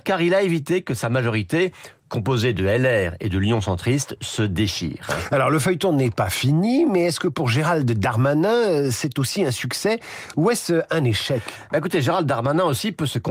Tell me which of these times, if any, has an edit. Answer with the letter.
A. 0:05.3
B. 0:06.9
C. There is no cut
C